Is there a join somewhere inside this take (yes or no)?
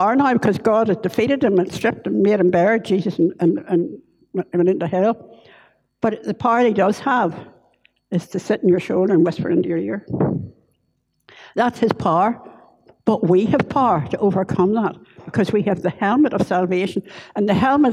no